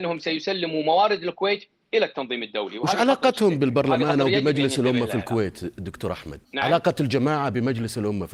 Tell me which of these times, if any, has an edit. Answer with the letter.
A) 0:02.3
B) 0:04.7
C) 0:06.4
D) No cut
C